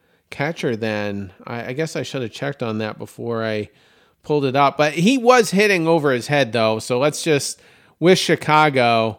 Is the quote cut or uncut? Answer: uncut